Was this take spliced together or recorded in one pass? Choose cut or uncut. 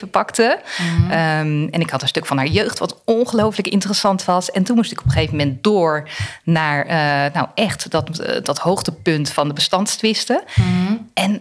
uncut